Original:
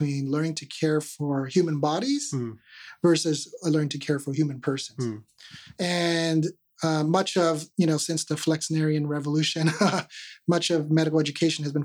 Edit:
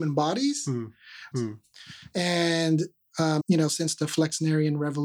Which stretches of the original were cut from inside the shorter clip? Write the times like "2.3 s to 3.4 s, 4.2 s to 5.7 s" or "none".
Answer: 3.0 s to 5.0 s, 7.0 s to 7.7 s